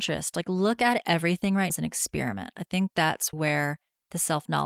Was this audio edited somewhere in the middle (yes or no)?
yes